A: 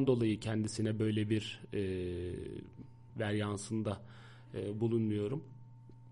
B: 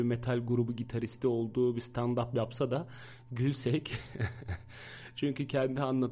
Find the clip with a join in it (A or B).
A